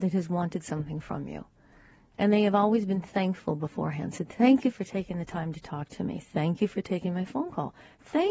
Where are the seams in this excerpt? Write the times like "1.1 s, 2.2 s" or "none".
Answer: none